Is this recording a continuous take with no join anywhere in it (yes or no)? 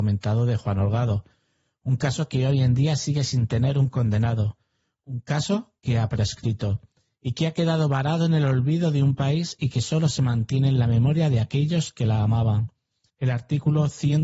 no